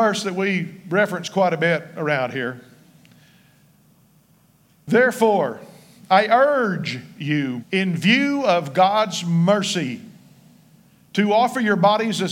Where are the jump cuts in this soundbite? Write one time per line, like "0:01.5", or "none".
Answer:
0:07.6